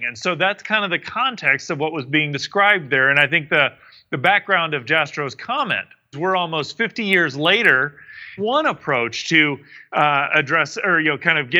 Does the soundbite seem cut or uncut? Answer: cut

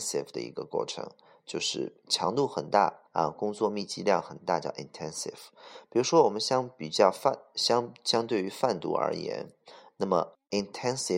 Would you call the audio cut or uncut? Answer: cut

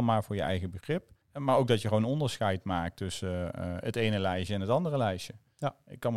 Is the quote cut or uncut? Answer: cut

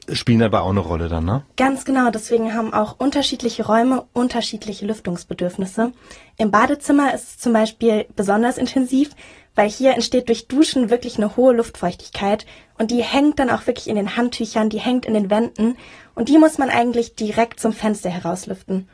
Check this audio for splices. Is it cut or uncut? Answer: uncut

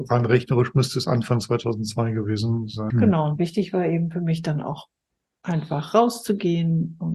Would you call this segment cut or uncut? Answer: cut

